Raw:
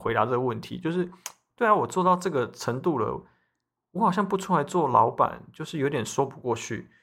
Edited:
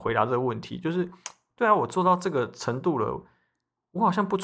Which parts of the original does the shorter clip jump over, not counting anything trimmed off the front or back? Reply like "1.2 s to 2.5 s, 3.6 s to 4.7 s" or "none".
none